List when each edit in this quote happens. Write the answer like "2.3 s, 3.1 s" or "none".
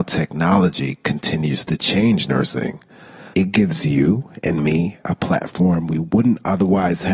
3.3 s